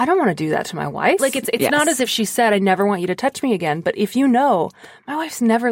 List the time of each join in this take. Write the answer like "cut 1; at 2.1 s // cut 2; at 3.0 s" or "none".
cut 1; at 1.2 s